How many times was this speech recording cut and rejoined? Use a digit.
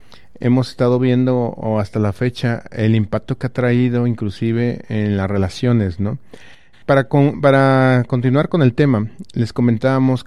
1